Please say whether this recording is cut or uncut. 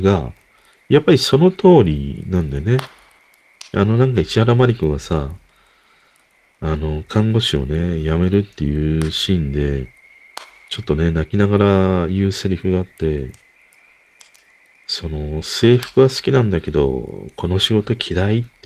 uncut